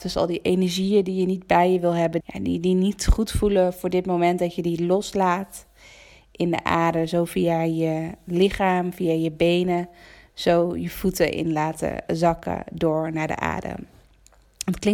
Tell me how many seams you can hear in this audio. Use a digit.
1